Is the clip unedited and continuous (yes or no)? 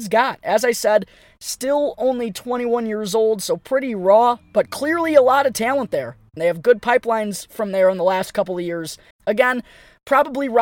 no